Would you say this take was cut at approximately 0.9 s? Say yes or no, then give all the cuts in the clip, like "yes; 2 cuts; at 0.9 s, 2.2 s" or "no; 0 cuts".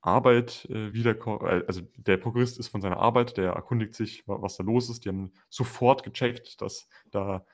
no; 0 cuts